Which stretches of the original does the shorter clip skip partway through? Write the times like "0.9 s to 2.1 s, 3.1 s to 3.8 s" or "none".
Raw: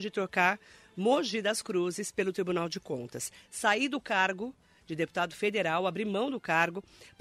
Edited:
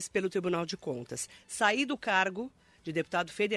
none